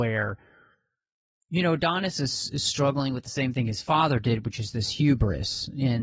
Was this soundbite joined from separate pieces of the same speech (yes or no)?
no